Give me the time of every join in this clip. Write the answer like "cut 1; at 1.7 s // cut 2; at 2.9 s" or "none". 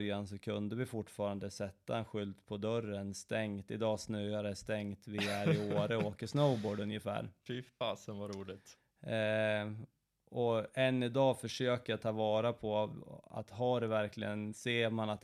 none